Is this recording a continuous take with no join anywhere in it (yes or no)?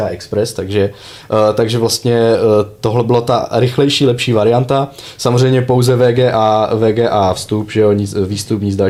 yes